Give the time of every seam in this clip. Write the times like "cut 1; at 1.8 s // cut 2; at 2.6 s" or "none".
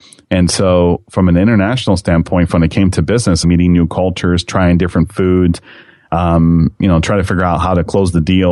cut 1; at 3.4 s